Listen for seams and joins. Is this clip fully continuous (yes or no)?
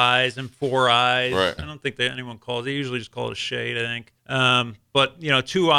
no